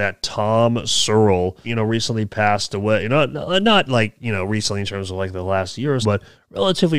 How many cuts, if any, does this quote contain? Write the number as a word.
two